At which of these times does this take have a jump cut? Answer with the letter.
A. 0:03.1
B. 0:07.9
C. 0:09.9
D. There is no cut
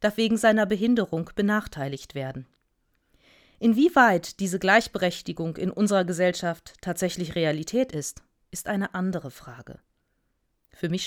D